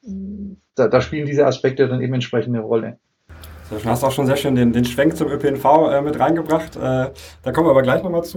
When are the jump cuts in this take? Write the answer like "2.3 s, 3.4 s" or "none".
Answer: none